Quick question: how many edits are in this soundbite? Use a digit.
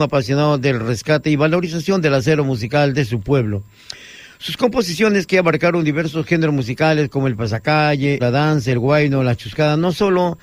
1